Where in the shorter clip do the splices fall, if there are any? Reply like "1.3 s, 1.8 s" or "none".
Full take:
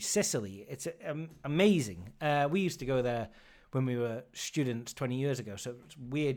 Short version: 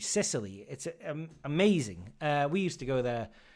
none